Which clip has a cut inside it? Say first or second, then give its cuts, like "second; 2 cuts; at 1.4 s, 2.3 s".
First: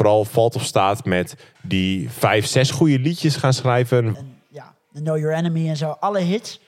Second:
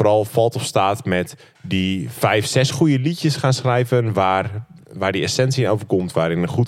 first; 1 cut; at 4.1 s